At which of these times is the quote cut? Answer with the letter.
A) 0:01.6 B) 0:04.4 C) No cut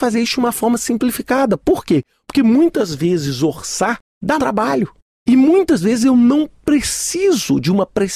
B